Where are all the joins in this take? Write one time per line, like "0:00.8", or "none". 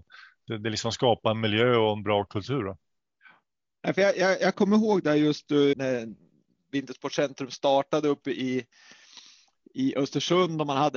0:05.7